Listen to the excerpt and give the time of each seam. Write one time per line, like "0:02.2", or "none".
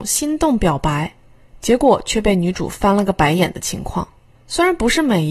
0:04.3